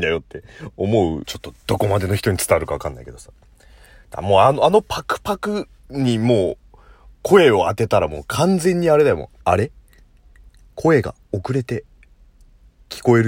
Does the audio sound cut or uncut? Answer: cut